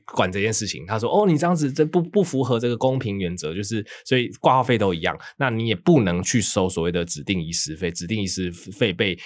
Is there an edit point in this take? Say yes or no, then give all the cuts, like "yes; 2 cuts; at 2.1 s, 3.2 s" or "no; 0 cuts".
no; 0 cuts